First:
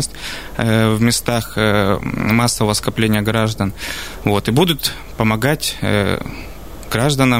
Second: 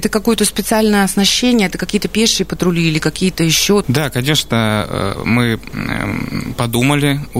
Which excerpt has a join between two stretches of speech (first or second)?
second